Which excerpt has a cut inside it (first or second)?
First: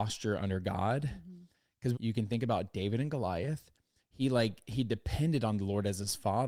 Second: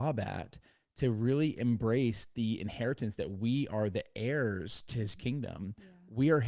first